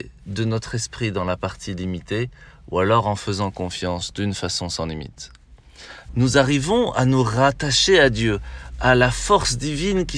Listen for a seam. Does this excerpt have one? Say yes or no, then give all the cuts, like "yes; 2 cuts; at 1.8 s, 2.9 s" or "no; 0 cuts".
yes; 1 cut; at 6.1 s